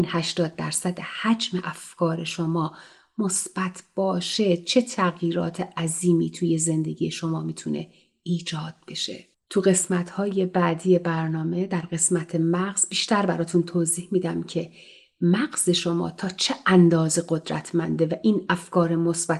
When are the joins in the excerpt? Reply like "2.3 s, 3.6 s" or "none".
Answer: none